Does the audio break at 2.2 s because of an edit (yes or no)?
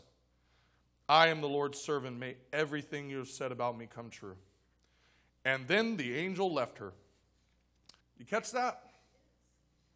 no